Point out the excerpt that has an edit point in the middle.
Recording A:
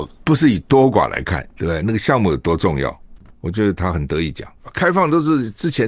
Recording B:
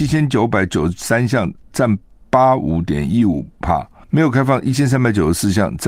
A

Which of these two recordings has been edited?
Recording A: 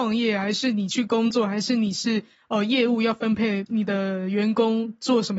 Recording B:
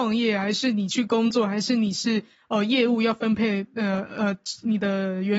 A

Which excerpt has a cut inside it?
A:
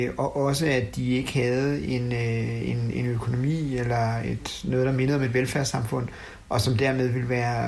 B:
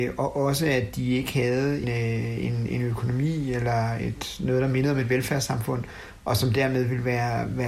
B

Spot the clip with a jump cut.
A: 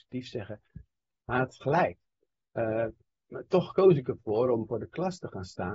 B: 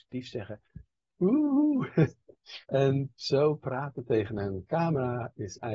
B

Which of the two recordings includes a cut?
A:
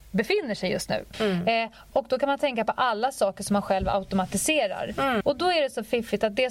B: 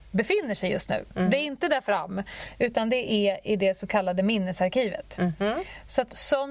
A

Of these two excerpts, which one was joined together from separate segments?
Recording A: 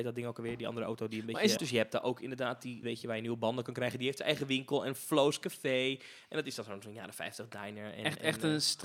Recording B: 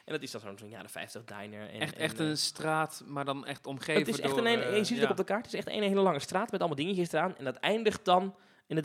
A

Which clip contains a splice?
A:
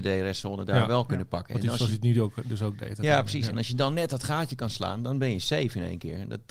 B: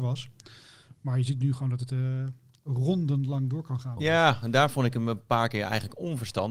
B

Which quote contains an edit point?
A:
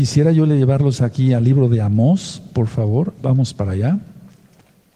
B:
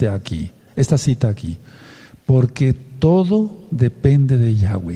A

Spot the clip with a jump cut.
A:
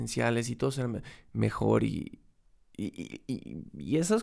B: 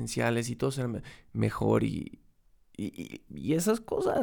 B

